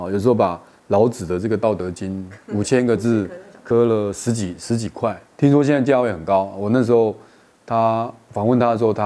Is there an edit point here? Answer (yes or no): no